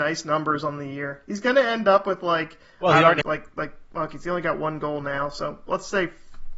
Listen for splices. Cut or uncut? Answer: cut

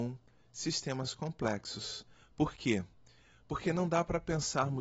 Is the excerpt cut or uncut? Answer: uncut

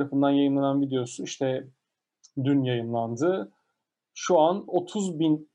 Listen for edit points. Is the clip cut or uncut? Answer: uncut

